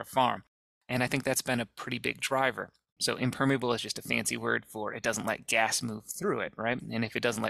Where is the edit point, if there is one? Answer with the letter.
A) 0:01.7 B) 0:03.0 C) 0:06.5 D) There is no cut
B